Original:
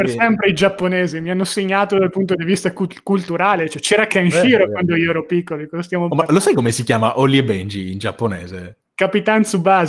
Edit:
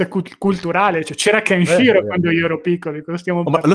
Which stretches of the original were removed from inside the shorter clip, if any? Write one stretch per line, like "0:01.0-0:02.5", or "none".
none